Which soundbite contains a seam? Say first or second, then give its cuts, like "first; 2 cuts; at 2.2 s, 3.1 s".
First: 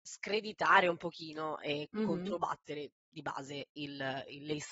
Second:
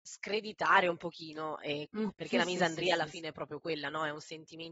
second; 1 cut; at 2.1 s